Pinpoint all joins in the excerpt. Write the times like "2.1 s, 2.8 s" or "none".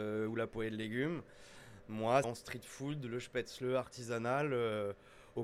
2.2 s